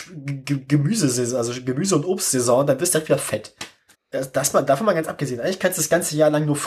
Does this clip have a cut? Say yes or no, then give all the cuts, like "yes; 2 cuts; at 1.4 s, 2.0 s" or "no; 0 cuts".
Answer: yes; 1 cut; at 3.9 s